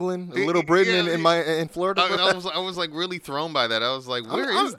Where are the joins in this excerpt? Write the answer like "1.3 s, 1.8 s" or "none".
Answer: 2.2 s